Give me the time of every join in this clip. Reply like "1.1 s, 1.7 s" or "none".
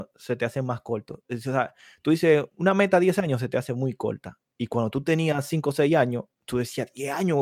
none